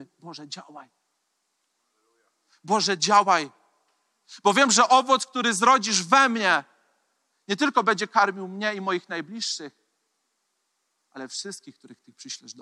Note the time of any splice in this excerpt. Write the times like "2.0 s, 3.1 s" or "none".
none